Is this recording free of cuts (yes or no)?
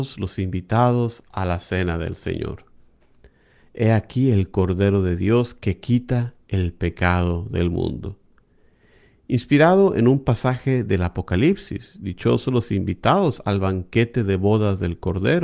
yes